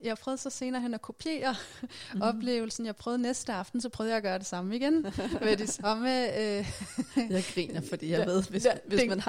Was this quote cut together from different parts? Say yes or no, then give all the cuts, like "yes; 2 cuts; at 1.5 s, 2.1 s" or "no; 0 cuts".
no; 0 cuts